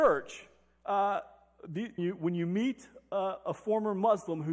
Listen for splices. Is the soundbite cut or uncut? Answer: cut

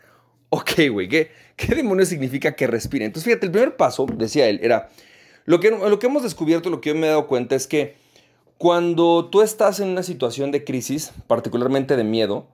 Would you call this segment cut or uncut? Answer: uncut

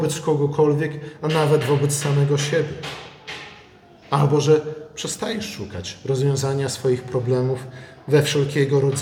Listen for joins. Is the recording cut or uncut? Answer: uncut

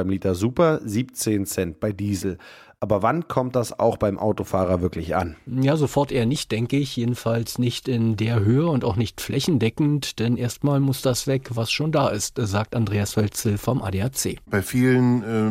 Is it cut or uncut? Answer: uncut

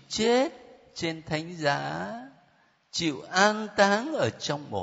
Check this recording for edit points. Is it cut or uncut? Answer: uncut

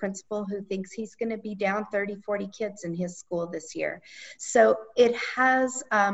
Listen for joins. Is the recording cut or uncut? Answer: uncut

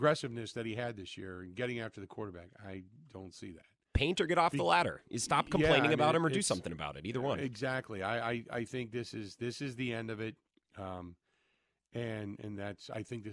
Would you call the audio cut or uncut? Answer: uncut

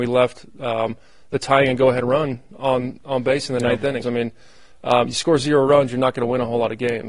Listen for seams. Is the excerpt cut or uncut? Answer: cut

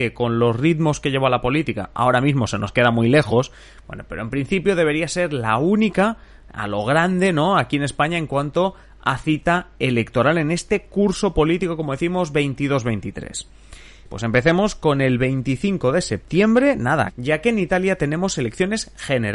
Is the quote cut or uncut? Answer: cut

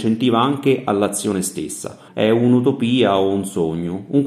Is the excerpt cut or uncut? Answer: cut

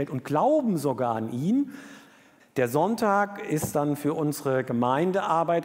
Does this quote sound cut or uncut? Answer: cut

